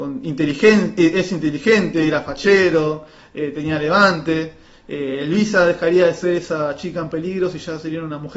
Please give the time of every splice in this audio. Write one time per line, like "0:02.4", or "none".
none